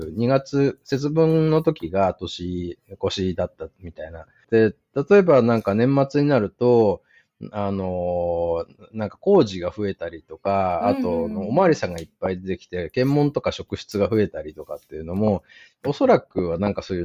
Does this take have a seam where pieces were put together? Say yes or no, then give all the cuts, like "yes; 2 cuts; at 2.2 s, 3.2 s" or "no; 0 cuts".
yes; 1 cut; at 4.4 s